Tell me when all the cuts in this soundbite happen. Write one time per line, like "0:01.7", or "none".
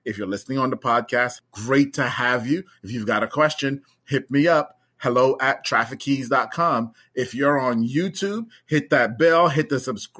0:01.4